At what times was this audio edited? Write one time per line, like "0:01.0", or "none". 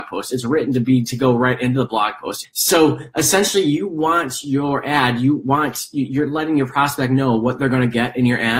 0:02.4